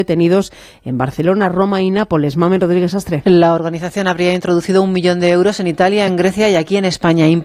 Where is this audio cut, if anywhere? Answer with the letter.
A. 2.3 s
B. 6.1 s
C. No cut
B